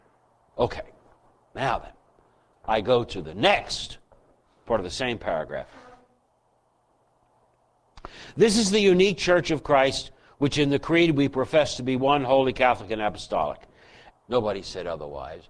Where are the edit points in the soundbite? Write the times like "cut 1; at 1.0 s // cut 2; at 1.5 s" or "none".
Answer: cut 1; at 14.1 s